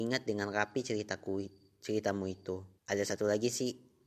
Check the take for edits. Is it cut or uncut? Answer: cut